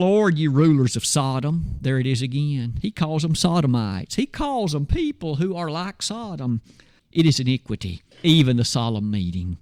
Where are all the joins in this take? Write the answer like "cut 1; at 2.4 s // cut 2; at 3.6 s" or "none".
cut 1; at 7.0 s // cut 2; at 8.1 s